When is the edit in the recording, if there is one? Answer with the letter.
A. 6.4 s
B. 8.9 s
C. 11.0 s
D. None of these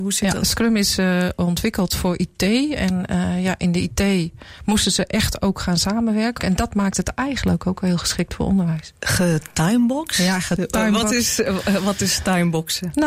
A